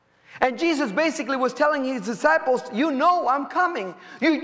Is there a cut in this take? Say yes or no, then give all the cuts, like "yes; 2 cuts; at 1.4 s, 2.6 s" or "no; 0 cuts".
no; 0 cuts